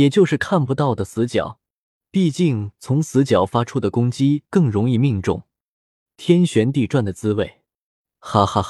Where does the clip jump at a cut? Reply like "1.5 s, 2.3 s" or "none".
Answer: 6.1 s